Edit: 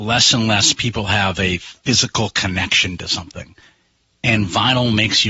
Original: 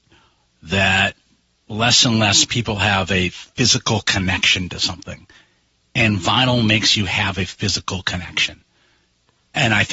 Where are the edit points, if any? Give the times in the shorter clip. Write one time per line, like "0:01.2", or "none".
none